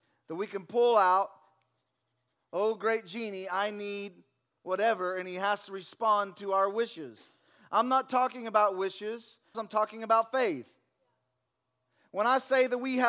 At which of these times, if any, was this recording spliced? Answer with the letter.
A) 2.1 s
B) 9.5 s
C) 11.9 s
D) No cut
B